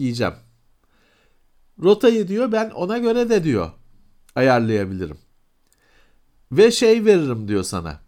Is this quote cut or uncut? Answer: uncut